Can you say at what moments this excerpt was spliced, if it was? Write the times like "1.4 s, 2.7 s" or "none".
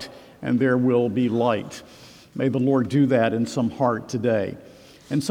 none